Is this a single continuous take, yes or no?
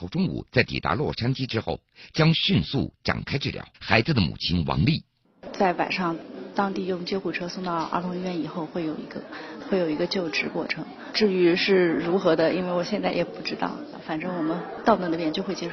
no